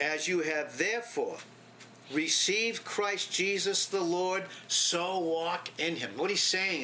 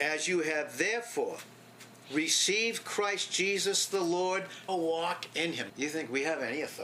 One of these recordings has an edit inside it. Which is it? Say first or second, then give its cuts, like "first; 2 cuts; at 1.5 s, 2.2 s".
second; 2 cuts; at 4.7 s, 5.7 s